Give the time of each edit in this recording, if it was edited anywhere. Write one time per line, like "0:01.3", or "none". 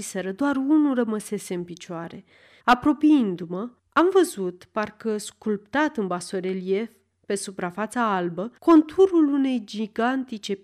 0:02.6
0:03.8
0:08.6